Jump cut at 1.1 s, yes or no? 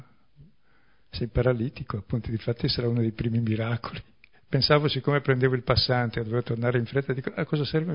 no